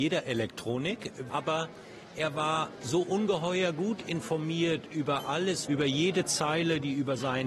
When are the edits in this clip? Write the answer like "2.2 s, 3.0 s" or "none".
1.3 s, 5.7 s